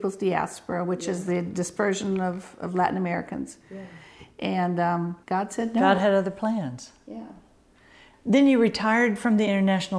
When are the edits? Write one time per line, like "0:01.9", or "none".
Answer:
0:05.2